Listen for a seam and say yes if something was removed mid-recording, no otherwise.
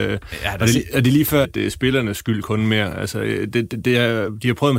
yes